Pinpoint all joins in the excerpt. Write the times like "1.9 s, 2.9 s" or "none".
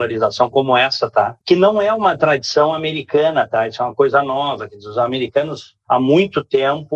1.4 s